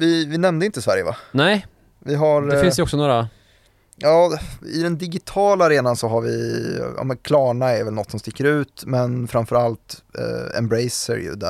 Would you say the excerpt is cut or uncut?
uncut